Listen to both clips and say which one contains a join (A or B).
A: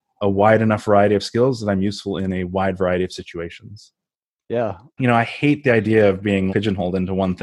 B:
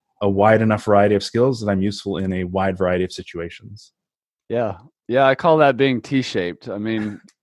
A